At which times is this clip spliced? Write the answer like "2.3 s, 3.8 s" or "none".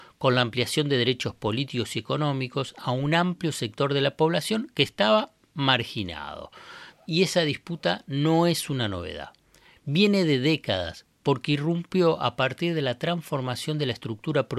6.9 s